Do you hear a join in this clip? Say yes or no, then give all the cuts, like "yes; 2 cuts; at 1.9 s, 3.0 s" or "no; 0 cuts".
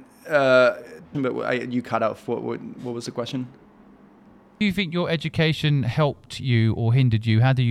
yes; 1 cut; at 1.1 s